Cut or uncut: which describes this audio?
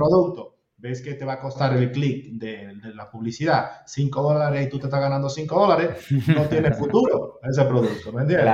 uncut